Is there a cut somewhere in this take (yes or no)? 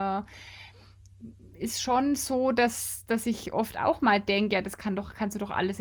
no